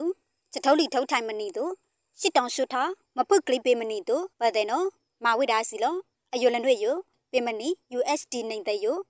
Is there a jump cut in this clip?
yes; 2 cuts; at 2.7 s, 4.3 s

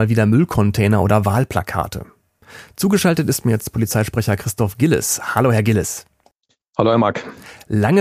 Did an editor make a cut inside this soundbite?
no; 0 cuts

